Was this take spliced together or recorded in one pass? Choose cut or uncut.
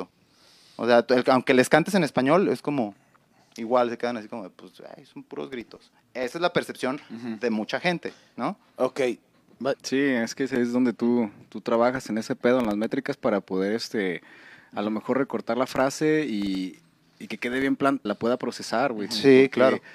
cut